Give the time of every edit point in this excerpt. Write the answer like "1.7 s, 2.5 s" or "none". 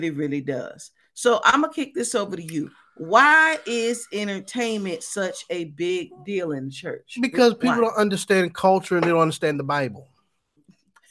none